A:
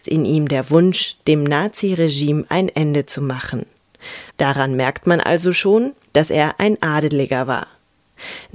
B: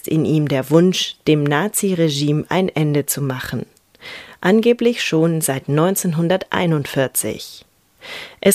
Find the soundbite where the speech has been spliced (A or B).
A